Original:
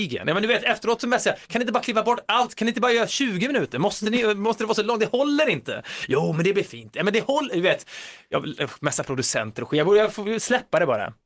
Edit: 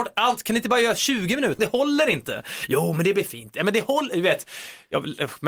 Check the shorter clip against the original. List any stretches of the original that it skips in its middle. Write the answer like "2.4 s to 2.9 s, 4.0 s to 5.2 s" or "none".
3.7 s to 5.0 s